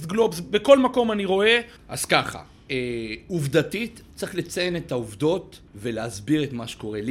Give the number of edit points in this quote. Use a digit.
2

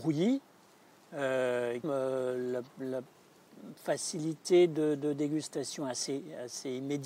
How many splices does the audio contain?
1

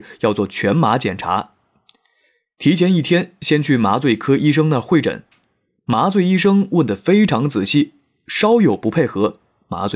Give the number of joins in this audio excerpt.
0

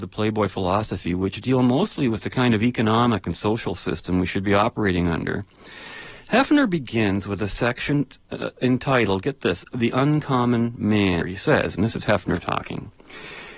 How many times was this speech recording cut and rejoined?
1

